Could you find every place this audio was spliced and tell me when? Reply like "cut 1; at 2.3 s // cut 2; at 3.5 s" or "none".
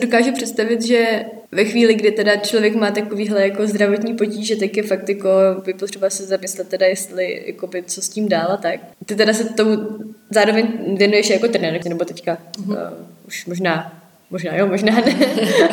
cut 1; at 1.5 s // cut 2; at 11.8 s

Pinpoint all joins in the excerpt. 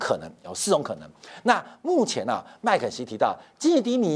none

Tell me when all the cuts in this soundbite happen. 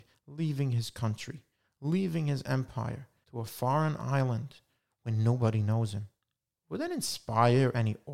cut 1; at 3.2 s // cut 2; at 6.5 s

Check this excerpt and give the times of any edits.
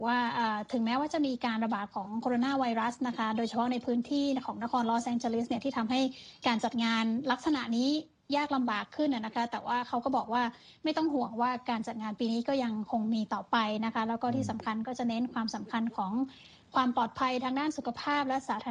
none

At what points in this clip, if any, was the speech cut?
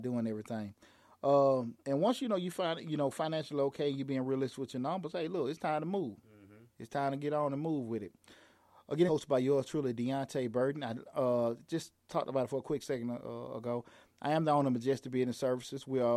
cut 1; at 1.8 s // cut 2; at 9.1 s

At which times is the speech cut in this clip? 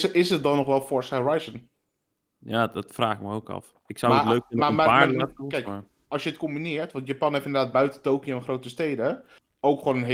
none

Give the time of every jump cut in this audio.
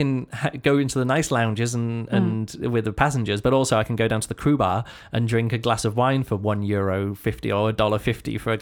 none

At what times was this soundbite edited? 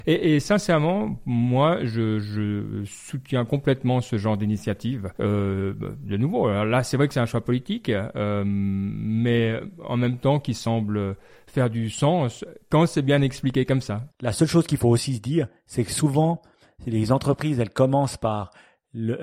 cut 1; at 5.1 s // cut 2; at 14.1 s

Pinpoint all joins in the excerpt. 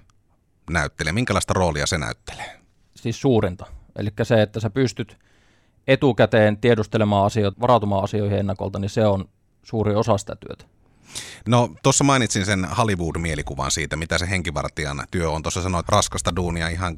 cut 1; at 7.5 s // cut 2; at 15.8 s

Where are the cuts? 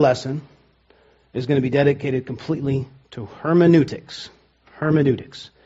none

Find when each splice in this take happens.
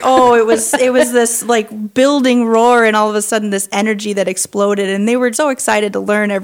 cut 1; at 5.3 s

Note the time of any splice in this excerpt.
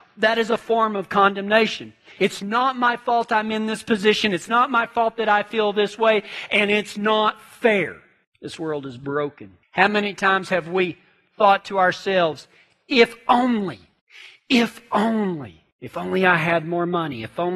cut 1; at 2.2 s

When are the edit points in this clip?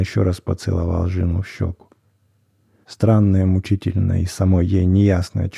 cut 1; at 2.8 s

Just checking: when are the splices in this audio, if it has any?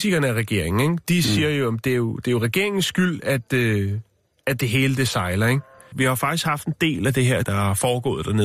cut 1; at 5.9 s // cut 2; at 7.4 s

